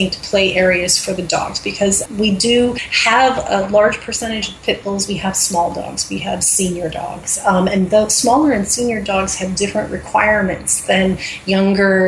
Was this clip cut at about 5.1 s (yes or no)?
yes